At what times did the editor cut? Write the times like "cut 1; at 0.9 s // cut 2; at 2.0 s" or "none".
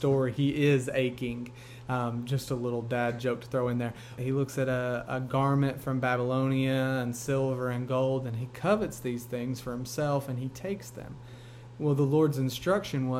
cut 1; at 4.2 s